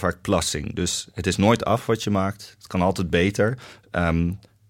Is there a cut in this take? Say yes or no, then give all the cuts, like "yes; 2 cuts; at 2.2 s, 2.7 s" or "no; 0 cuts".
no; 0 cuts